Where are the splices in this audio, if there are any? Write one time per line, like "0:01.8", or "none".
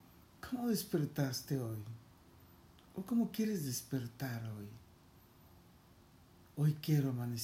none